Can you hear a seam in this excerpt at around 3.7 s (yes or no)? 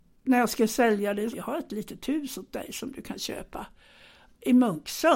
no